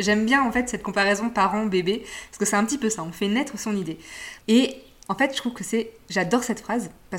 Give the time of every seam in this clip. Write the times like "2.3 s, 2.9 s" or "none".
4.4 s